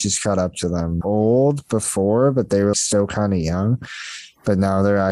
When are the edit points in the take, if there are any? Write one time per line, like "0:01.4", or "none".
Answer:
0:01.0
0:02.7

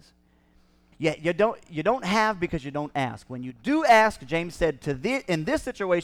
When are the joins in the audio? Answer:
0:00.9

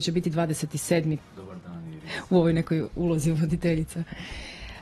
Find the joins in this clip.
0:01.2

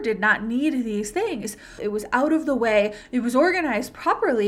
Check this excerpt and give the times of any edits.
0:01.8

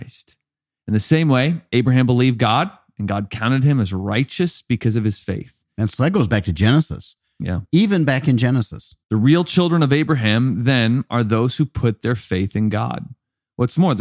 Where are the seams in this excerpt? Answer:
0:07.7
0:09.0

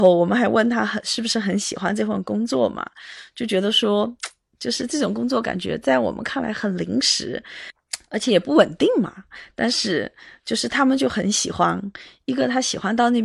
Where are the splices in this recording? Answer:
none

